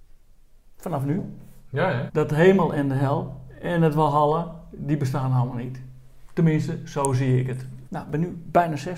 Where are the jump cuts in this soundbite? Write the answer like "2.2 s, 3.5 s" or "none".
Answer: 2.1 s, 7.9 s